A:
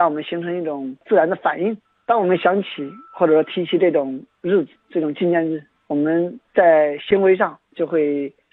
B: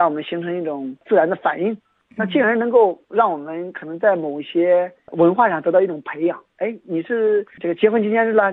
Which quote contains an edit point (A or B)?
B